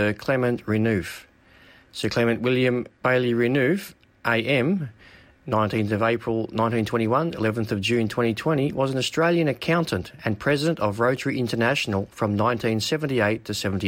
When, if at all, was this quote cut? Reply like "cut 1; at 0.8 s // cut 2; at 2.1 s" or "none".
cut 1; at 2.9 s